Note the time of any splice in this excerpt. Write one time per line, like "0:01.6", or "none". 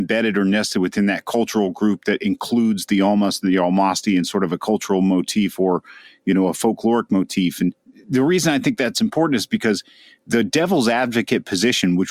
none